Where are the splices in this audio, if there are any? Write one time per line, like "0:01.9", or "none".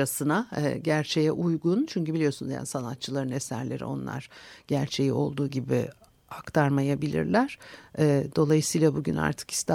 0:07.8